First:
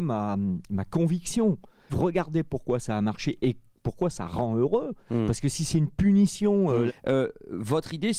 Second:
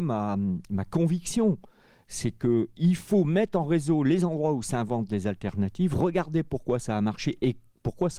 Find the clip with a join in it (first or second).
first